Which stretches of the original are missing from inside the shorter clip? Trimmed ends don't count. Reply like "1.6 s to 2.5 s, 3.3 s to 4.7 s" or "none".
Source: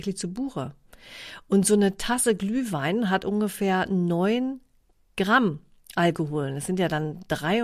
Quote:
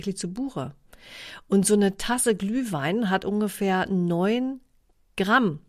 none